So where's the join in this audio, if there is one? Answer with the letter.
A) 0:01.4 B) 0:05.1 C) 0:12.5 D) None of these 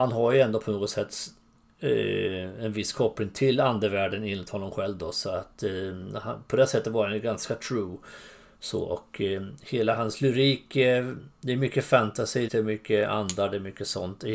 C